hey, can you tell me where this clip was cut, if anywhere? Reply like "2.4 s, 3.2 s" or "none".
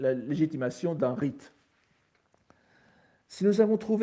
none